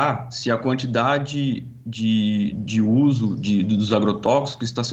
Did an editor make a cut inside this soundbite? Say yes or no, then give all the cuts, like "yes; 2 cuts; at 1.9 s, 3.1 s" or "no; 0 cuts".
no; 0 cuts